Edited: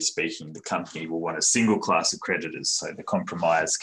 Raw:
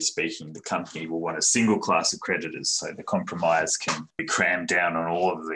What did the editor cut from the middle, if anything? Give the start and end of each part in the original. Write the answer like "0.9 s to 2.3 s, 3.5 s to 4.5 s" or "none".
none